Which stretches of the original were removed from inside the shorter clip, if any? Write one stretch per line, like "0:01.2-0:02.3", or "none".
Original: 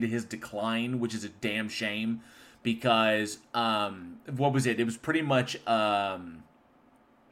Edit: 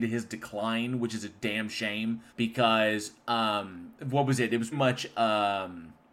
0:02.3-0:02.6
0:05.0-0:05.2